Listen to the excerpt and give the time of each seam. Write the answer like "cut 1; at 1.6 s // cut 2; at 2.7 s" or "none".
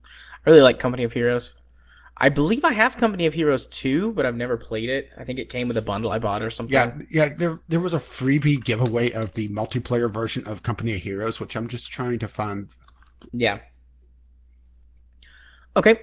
cut 1; at 13.3 s

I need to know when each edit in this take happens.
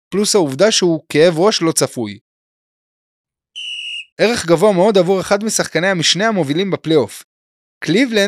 cut 1; at 4.1 s

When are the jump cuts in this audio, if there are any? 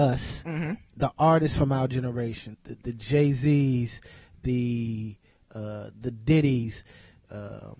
cut 1; at 2.5 s

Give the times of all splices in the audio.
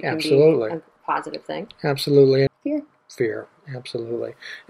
cut 1; at 2.5 s

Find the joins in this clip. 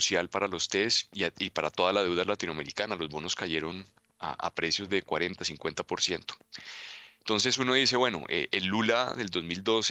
none

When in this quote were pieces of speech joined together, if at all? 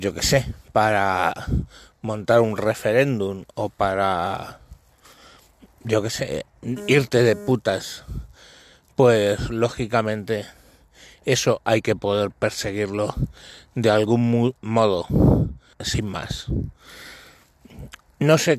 cut 1; at 15.7 s

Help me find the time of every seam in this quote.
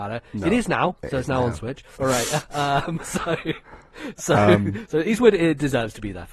cut 1; at 2.0 s

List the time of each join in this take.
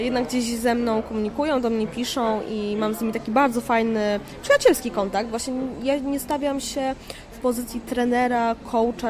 none

